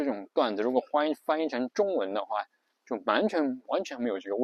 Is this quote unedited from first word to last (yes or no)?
yes